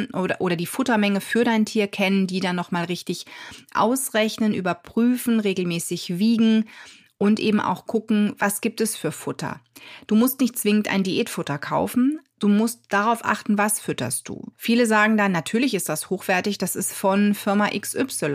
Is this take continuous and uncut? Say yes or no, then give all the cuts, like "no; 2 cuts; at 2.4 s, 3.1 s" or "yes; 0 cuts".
no; 1 cut; at 14.5 s